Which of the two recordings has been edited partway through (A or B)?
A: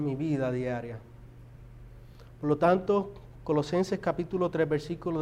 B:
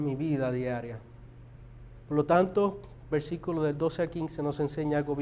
B